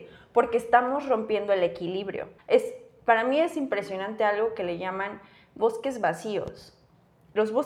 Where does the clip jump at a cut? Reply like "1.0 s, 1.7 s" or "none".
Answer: 2.4 s